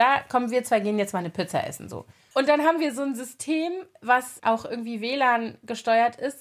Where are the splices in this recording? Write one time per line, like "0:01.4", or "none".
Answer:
0:02.3
0:04.4